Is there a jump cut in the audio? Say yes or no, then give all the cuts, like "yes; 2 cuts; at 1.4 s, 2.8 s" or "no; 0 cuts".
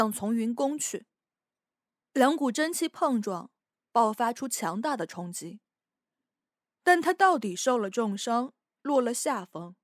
yes; 2 cuts; at 2.1 s, 8.8 s